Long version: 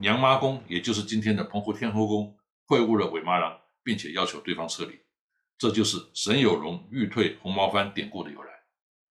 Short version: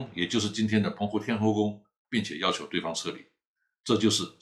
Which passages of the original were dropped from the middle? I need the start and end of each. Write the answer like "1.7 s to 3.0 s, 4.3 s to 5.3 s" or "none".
2.6 s to 3.8 s